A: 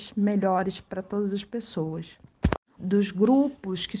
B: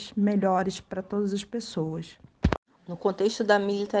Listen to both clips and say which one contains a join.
A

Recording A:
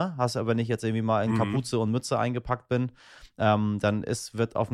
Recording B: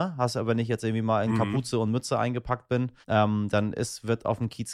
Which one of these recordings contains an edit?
B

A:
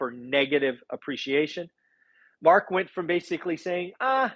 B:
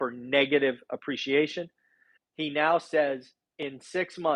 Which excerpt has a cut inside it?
B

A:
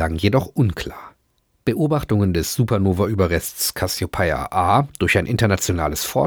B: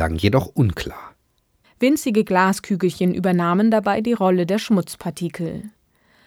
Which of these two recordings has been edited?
B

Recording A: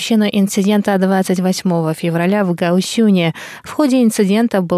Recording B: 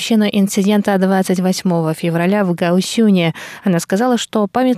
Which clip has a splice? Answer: A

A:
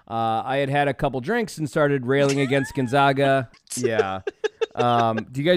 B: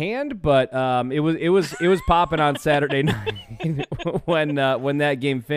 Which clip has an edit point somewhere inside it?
A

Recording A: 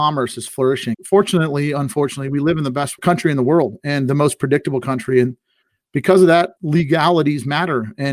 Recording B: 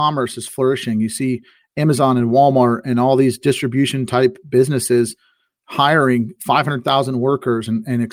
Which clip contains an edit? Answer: A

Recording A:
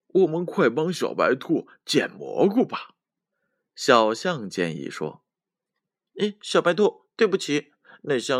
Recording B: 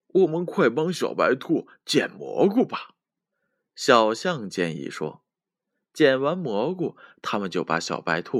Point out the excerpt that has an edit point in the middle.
A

